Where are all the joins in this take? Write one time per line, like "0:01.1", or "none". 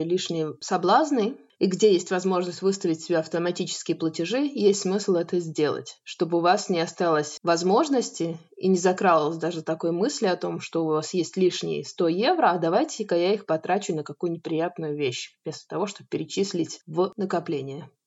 none